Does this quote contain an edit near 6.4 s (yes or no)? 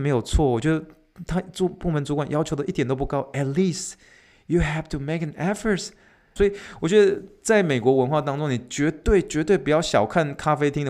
yes